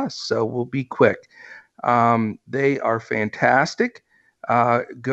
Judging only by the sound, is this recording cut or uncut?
cut